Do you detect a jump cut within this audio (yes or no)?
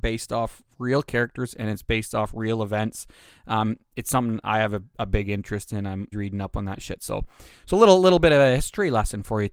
yes